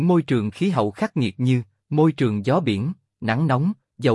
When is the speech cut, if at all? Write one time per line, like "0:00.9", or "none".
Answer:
none

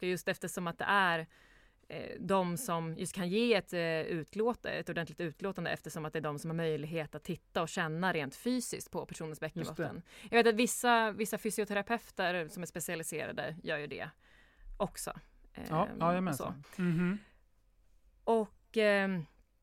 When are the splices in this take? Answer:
0:16.6

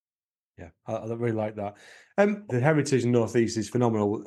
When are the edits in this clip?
0:02.5

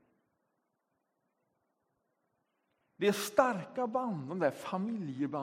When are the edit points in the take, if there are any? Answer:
0:02.8

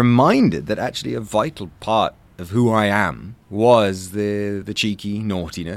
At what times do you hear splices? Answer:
0:04.6

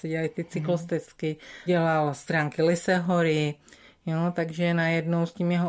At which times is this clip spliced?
0:01.7

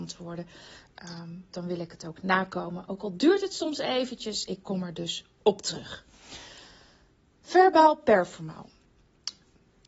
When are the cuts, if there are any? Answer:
0:01.5

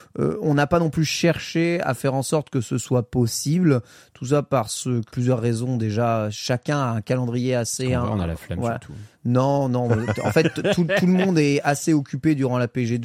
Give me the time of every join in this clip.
0:05.1

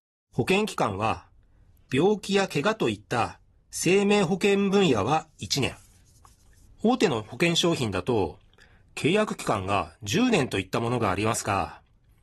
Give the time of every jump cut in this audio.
0:06.7

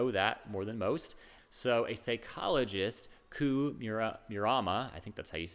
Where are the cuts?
0:01.4

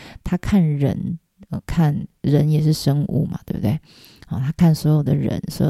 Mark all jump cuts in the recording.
none

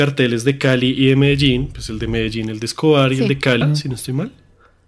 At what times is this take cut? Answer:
0:03.6

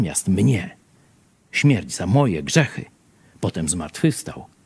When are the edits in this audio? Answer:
none

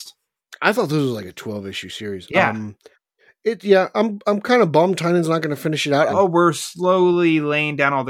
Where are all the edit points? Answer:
0:06.1

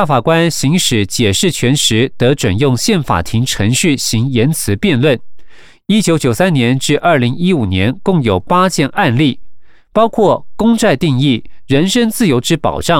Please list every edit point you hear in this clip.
0:03.0

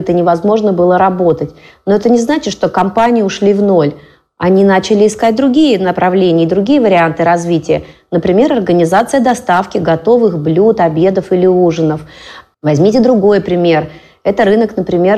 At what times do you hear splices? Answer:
0:12.5

